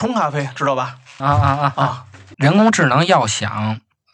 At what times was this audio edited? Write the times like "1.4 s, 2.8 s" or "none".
1.2 s, 2.3 s